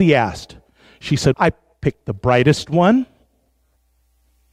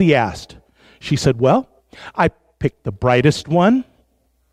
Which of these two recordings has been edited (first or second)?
first